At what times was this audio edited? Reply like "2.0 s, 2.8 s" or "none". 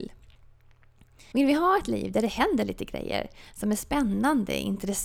1.3 s

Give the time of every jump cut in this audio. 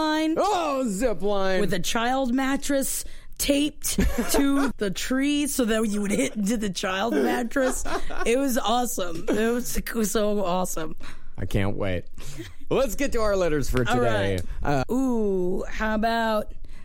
4.7 s, 14.8 s

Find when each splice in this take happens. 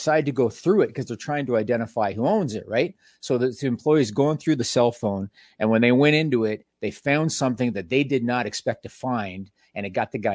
none

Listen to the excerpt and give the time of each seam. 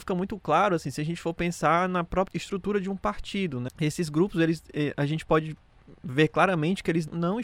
3.7 s

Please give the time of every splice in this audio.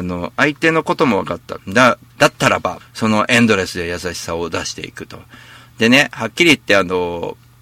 1.6 s, 2.8 s

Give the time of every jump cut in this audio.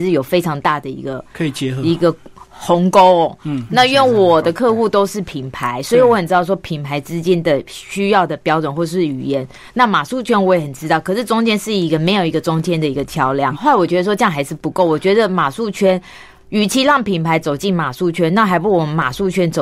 13.5 s

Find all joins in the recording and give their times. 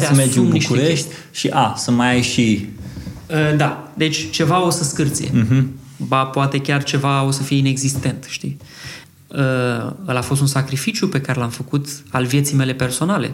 9.0 s

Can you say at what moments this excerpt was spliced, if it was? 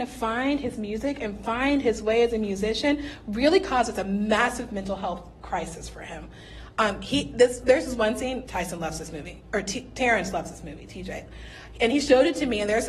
8.4 s

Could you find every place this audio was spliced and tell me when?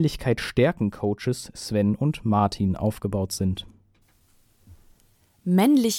none

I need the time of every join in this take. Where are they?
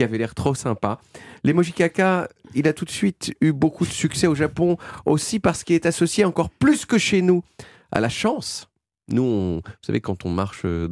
none

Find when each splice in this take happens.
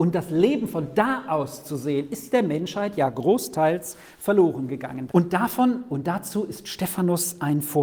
5.1 s

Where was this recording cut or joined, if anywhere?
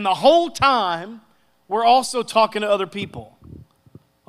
none

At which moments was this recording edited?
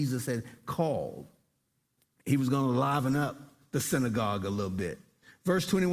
none

